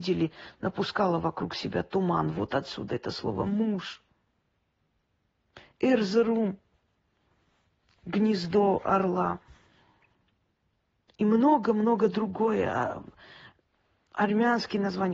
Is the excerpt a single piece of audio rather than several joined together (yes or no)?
yes